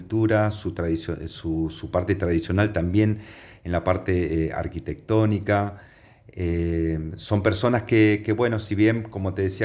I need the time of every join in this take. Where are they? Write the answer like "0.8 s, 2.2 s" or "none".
none